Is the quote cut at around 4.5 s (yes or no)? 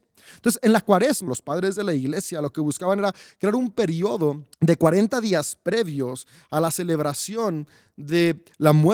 yes